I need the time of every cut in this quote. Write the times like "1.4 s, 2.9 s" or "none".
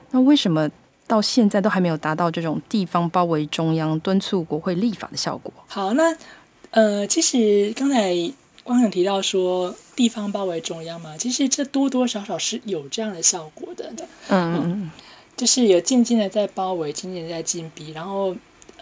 5.7 s, 14.0 s